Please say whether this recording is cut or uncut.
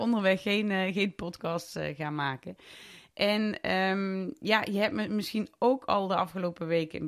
uncut